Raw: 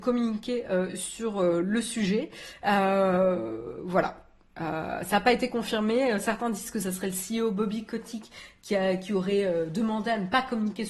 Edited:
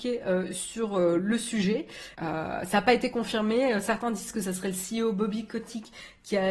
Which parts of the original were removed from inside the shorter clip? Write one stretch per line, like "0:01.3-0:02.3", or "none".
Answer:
0:02.6-0:04.5